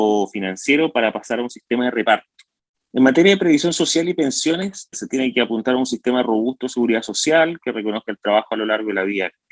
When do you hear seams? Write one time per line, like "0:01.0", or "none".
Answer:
0:02.7
0:04.9